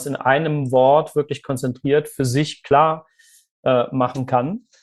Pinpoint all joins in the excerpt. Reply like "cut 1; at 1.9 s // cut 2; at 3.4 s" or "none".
none